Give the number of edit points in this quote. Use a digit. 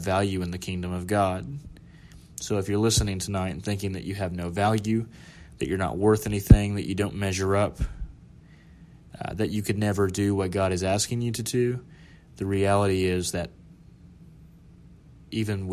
0